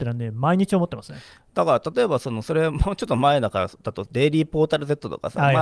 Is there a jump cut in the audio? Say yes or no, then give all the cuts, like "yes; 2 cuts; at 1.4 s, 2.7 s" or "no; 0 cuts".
no; 0 cuts